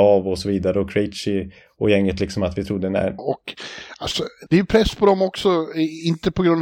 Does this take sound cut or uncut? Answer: cut